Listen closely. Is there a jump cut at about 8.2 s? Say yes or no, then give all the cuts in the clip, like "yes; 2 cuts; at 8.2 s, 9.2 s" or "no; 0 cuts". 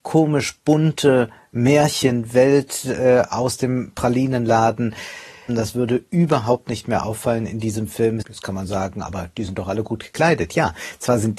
yes; 2 cuts; at 5.5 s, 8.2 s